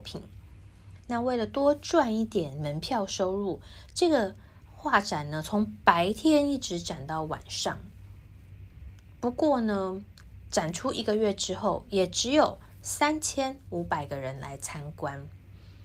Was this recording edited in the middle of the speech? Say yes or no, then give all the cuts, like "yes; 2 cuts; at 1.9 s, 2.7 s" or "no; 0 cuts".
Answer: no; 0 cuts